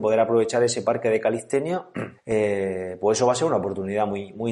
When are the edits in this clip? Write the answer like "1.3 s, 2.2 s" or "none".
2.1 s